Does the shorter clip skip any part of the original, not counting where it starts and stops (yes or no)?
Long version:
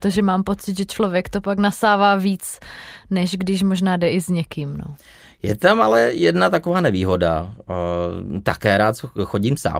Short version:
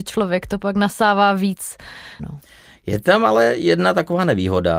yes